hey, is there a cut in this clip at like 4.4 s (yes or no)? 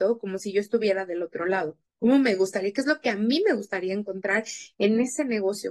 no